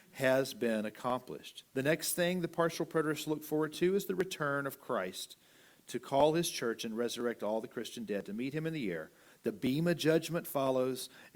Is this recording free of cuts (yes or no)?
no